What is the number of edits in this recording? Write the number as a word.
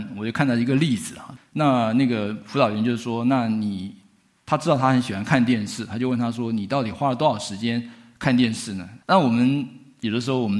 two